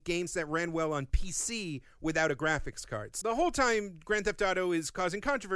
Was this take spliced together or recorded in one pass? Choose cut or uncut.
cut